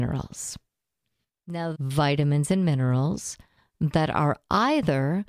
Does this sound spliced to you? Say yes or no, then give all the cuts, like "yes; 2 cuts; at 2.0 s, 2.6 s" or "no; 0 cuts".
yes; 1 cut; at 1.7 s